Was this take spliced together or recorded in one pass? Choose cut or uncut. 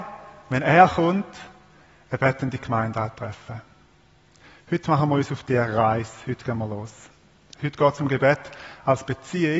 uncut